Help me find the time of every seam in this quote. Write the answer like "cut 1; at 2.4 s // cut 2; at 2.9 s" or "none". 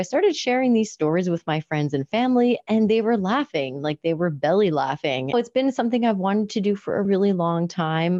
cut 1; at 5.3 s // cut 2; at 7.1 s

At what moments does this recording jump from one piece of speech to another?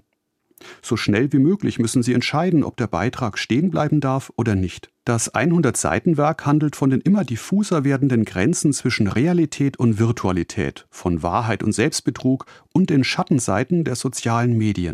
cut 1; at 5.0 s

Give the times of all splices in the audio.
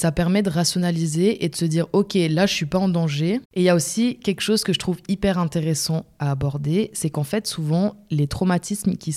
cut 1; at 3.4 s

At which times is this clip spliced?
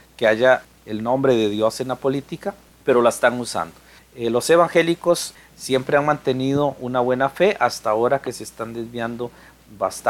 cut 1; at 4.0 s

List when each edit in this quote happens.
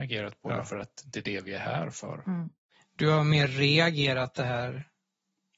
none

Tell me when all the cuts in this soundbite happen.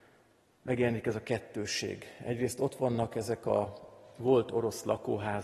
none

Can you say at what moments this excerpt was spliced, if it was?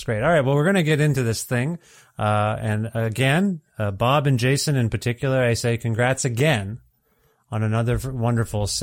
none

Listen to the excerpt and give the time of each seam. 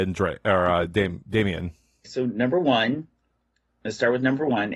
cut 1; at 2.0 s

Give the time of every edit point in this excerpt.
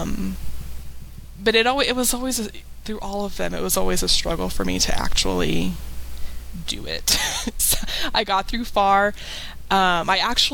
none

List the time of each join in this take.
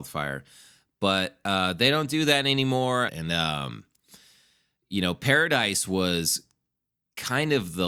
cut 1; at 3.1 s

